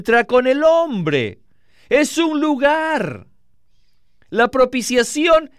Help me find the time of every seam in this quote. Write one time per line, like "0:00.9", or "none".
none

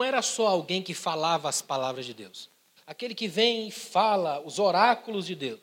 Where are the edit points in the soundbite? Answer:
0:02.8

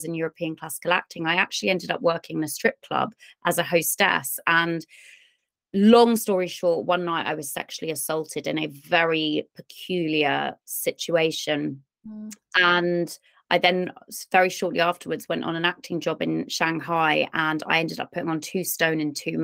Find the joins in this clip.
none

